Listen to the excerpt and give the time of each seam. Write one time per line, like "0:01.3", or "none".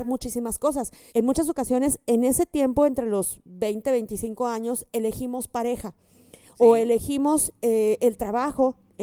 0:01.1